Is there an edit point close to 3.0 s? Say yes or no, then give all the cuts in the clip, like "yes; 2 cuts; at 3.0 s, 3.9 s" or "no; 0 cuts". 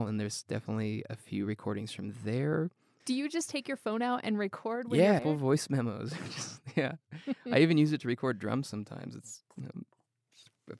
yes; 2 cuts; at 3.0 s, 5.2 s